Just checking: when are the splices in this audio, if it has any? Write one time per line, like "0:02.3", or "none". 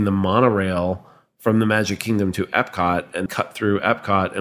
0:03.3